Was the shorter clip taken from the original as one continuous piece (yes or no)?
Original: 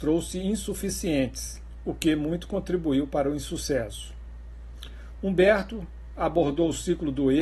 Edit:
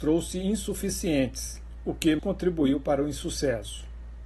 no